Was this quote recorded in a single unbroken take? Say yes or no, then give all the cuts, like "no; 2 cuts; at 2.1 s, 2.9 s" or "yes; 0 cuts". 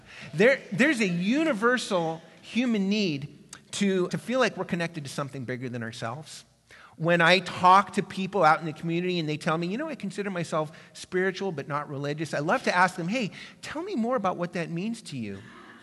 no; 1 cut; at 4.1 s